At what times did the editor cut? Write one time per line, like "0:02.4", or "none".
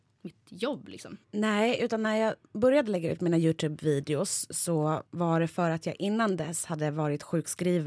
0:01.2
0:05.1